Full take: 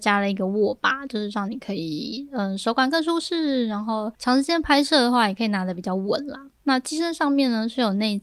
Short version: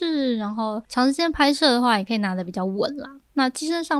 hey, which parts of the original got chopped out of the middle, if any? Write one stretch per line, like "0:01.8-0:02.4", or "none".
none